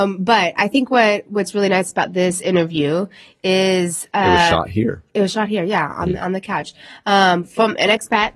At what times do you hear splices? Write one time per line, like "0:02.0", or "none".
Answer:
none